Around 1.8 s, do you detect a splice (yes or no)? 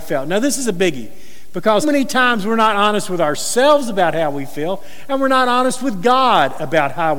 yes